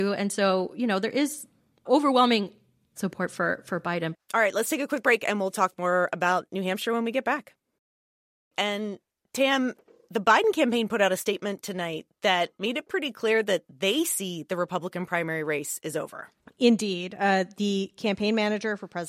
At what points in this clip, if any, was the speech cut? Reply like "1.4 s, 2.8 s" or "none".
4.1 s, 8.5 s